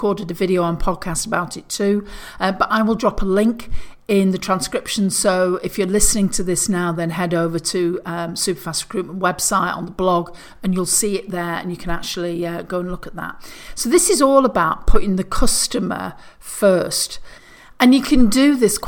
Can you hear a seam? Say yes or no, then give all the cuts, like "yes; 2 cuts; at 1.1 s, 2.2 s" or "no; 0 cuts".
no; 0 cuts